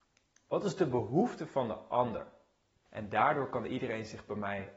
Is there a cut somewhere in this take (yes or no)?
yes